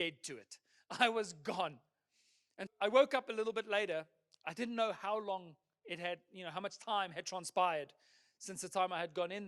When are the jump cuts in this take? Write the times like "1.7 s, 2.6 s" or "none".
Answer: 2.7 s